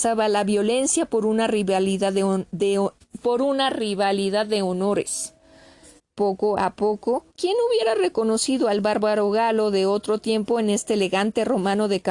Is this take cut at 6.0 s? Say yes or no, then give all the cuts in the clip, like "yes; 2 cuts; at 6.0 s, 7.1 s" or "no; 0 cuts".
yes; 2 cuts; at 6.0 s, 7.3 s